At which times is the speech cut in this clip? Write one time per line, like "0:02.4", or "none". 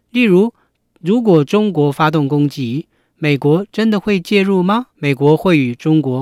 0:04.9